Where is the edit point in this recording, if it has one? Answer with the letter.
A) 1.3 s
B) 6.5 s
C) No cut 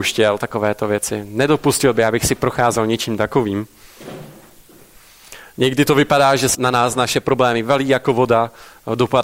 B